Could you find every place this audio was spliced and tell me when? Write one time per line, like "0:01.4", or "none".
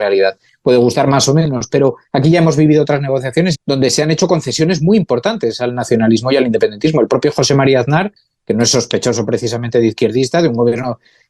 0:03.5